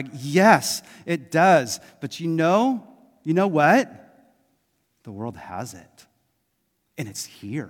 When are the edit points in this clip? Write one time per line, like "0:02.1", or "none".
none